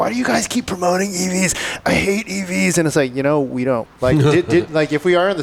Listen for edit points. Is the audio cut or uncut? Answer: cut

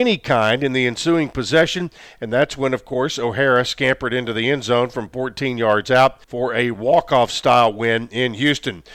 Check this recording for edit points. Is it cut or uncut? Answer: cut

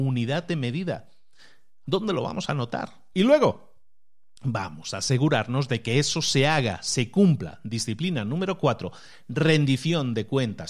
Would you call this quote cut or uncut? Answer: cut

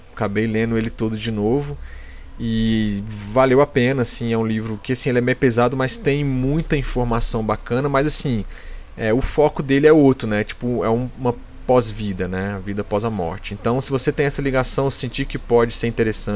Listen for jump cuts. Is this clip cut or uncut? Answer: uncut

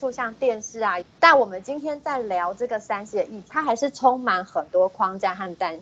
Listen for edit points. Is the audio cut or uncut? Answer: cut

